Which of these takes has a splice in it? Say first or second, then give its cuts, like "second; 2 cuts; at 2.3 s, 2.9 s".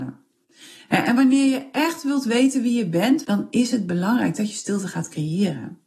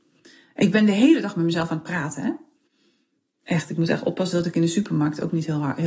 first; 1 cut; at 3.2 s